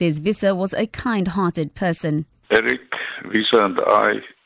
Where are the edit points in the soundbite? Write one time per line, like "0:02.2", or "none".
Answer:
none